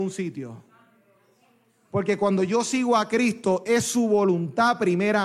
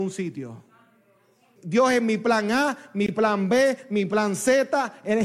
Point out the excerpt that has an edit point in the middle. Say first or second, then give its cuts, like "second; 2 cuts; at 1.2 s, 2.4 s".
second; 1 cut; at 1.6 s